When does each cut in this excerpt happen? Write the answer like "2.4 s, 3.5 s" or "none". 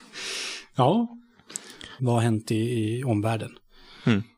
2.0 s